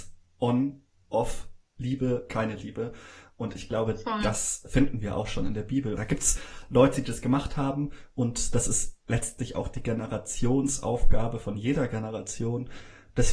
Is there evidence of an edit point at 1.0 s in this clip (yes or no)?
no